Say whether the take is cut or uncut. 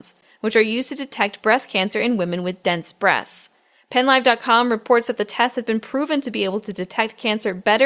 uncut